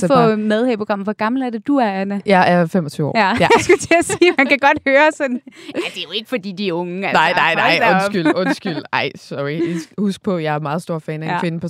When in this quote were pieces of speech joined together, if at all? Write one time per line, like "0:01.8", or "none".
none